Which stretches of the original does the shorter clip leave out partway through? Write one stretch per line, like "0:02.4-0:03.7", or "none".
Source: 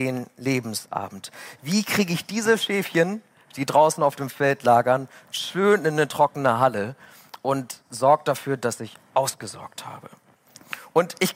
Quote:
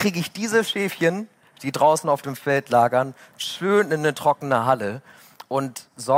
none